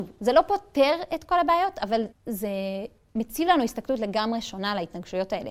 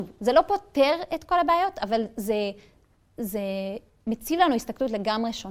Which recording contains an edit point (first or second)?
first